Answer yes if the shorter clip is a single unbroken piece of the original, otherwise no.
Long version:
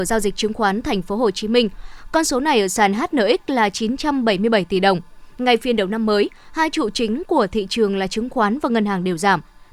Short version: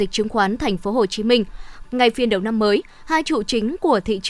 no